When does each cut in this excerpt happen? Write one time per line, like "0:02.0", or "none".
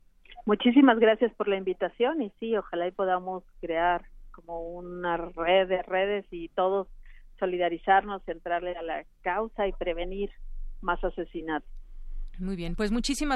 none